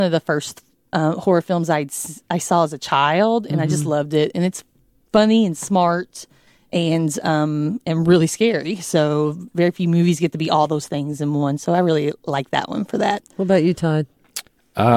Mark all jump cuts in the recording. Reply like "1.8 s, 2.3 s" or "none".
none